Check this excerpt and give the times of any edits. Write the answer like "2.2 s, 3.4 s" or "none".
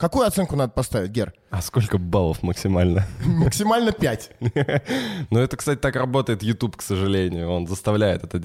5.3 s